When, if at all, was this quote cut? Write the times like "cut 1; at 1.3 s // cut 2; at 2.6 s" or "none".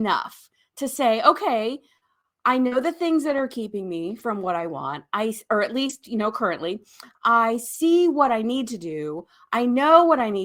none